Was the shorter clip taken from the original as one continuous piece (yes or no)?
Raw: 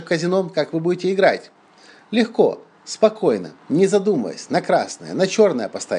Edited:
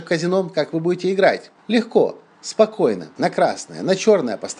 no